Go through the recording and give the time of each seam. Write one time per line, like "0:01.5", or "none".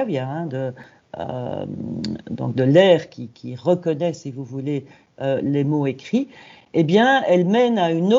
none